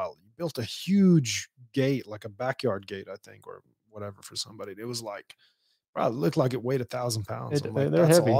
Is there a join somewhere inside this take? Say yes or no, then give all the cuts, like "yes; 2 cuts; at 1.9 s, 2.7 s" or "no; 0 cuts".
no; 0 cuts